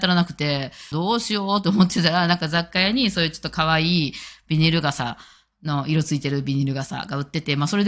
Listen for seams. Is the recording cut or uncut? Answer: cut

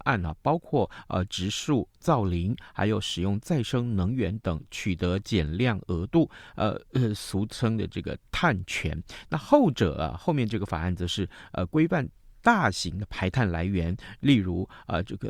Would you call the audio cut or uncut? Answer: uncut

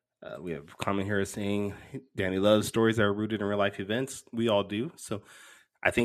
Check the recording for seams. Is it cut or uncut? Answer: uncut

